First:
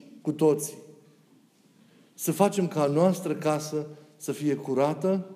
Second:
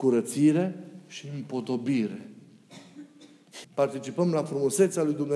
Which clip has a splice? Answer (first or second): second